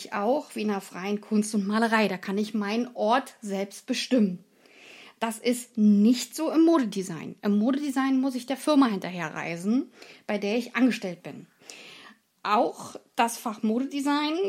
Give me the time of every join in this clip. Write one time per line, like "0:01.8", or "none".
none